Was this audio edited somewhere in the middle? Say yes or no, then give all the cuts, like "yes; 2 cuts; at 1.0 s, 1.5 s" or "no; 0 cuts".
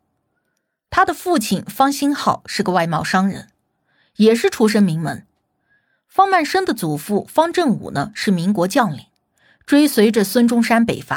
no; 0 cuts